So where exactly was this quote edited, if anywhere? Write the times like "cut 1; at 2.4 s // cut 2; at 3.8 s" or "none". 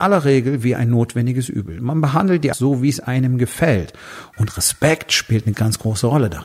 cut 1; at 2.5 s // cut 2; at 4.3 s // cut 3; at 5.5 s